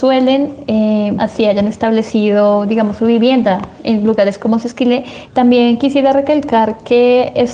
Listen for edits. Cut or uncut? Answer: cut